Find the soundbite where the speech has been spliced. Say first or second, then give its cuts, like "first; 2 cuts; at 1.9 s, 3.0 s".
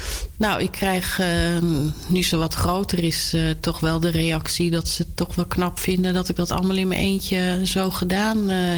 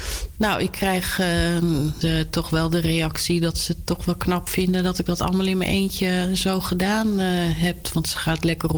second; 1 cut; at 2.0 s